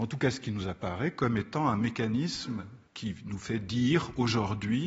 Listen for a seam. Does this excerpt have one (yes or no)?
yes